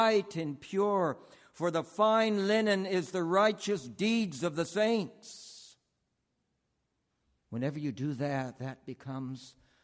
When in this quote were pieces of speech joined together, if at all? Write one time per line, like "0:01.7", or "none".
0:07.4